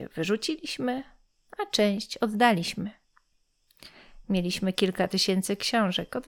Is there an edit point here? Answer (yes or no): no